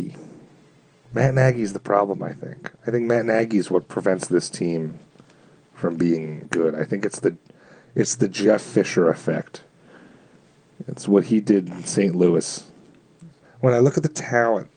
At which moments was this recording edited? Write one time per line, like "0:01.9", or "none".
0:06.4
0:13.4